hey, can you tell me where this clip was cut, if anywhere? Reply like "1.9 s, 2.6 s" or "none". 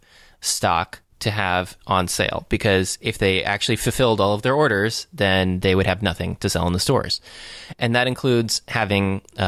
none